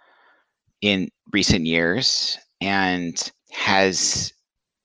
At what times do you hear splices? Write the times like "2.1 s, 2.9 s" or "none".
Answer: 3.4 s